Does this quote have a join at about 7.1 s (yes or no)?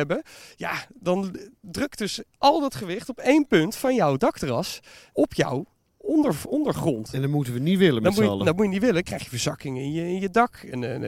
no